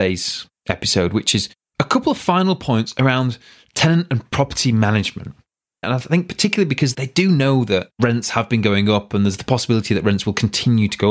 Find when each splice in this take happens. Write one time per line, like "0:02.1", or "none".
0:05.8
0:06.9